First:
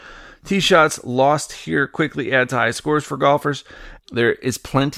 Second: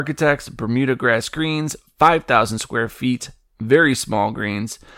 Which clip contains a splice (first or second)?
first